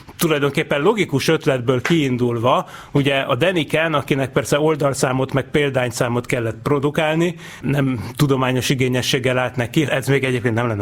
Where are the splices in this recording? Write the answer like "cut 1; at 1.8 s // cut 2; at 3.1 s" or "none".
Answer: cut 1; at 7.6 s // cut 2; at 9.9 s